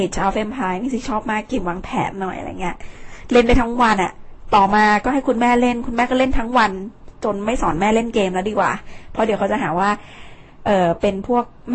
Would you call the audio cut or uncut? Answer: cut